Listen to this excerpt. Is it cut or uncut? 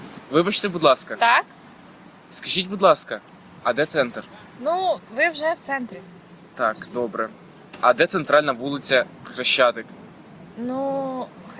uncut